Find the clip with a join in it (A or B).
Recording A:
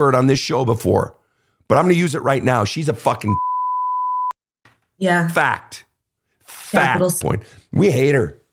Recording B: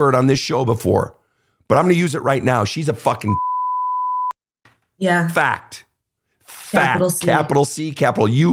A